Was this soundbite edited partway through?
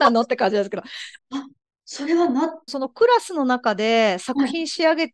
yes; 2 cuts; at 1.2 s, 2.7 s

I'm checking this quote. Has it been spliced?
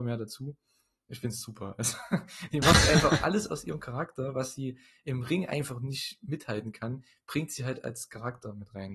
no; 0 cuts

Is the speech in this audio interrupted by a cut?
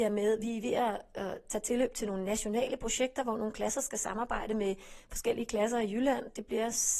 no; 0 cuts

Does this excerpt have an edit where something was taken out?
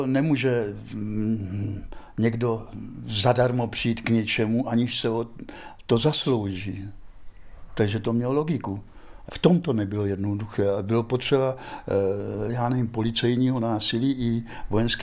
yes; 1 cut; at 9.3 s

